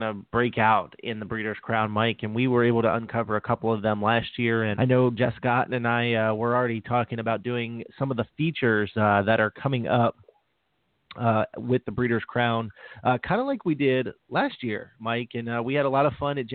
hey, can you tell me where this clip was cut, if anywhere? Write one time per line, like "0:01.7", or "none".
0:04.8